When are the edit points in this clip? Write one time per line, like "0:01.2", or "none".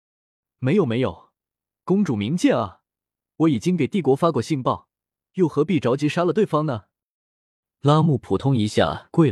none